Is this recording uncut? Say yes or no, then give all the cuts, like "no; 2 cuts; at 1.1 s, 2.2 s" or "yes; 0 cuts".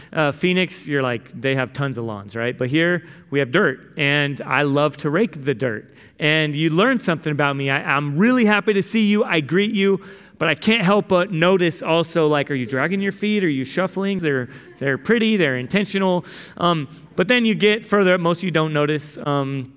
no; 1 cut; at 14.2 s